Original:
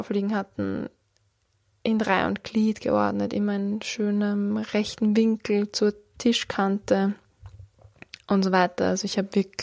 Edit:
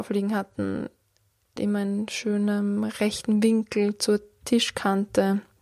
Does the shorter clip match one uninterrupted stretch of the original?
no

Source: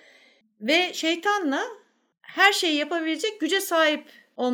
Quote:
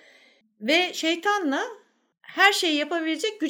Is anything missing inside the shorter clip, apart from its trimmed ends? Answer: no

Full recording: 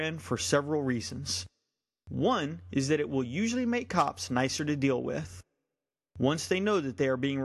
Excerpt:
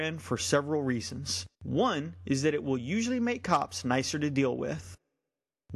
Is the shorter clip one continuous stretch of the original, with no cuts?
no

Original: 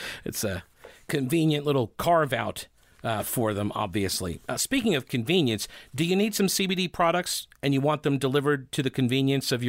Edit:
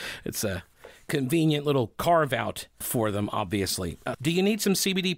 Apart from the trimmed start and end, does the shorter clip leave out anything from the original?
yes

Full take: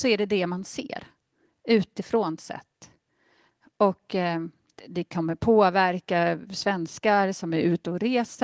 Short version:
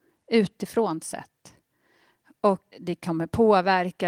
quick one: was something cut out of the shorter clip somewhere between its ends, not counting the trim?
yes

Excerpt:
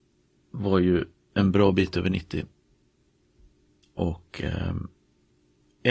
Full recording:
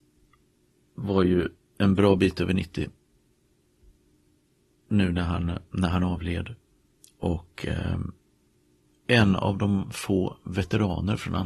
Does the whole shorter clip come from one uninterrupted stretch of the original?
no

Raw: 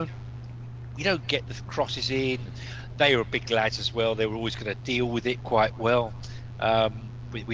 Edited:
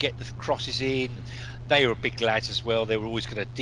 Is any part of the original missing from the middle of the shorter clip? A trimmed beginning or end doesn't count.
no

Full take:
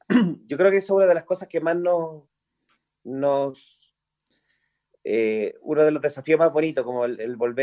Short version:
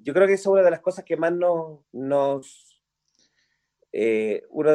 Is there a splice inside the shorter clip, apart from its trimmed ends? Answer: yes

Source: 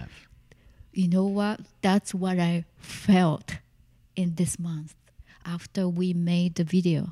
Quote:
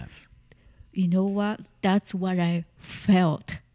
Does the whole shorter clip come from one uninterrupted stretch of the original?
yes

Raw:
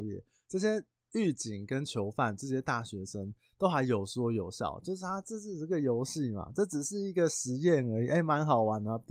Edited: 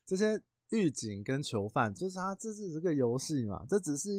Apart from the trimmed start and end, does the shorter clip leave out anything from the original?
yes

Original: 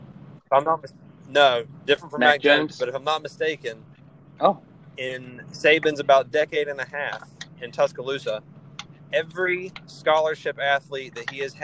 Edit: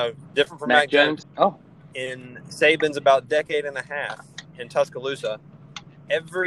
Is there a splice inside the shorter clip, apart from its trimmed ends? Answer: yes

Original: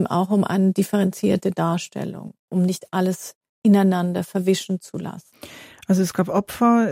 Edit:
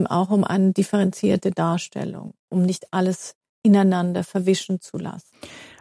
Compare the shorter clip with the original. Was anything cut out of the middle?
no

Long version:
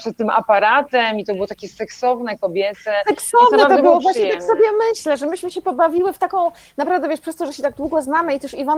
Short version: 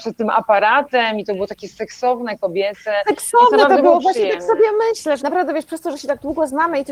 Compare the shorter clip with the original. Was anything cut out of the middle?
yes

